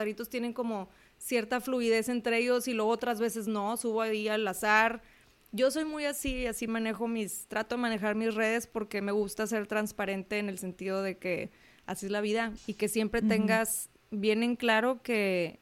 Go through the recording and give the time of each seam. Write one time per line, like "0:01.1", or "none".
0:12.6